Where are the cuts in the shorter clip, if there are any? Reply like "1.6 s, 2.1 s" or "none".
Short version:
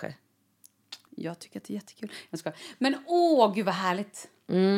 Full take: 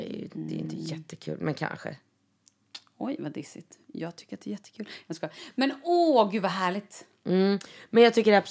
1.1 s